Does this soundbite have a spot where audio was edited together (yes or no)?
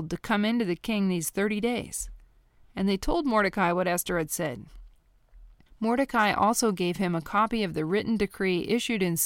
yes